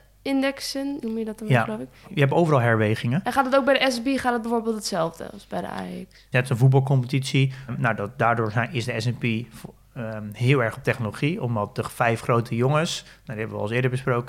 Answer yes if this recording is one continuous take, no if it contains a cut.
no